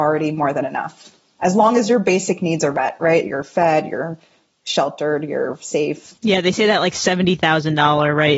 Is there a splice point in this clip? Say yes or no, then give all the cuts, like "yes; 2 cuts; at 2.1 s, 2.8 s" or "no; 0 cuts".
yes; 1 cut; at 6.2 s